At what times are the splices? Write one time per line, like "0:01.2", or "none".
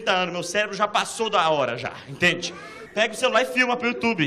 0:02.9